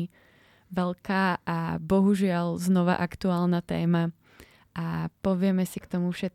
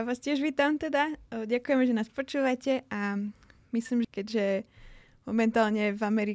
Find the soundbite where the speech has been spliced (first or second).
second